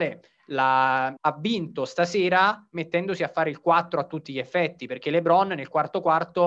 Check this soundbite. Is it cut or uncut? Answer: cut